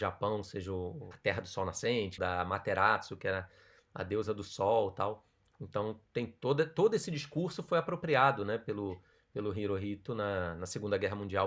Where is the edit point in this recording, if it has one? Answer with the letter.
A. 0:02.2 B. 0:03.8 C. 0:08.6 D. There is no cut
A